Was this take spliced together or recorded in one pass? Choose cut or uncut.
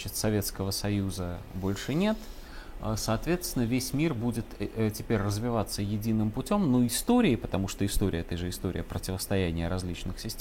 uncut